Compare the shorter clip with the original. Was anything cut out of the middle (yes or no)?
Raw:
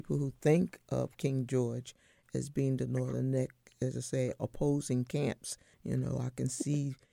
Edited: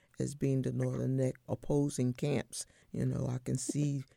yes